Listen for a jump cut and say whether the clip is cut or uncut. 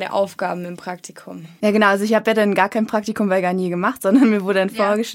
uncut